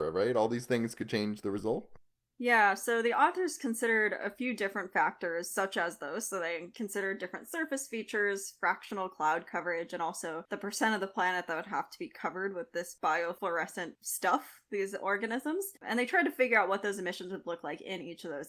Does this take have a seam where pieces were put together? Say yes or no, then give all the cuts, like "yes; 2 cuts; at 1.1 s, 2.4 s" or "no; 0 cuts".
no; 0 cuts